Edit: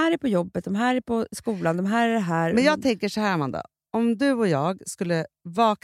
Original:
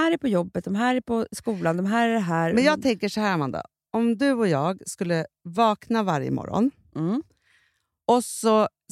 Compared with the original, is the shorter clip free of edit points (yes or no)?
yes